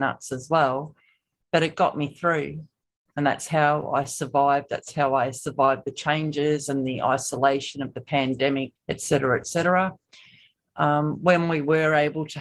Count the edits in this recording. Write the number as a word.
one